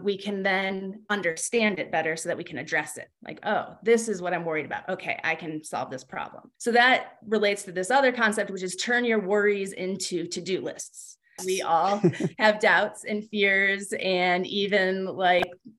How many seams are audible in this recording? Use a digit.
2